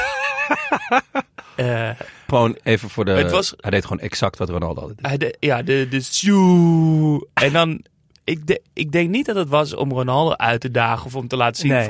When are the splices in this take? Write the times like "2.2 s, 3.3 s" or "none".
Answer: 2.3 s